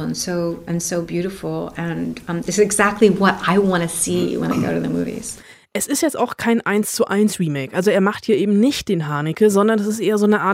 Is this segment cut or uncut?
uncut